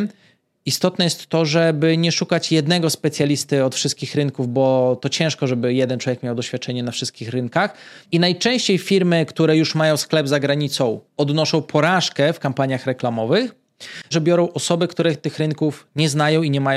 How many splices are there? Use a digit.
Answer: 3